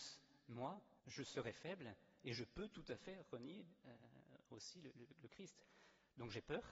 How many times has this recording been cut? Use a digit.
1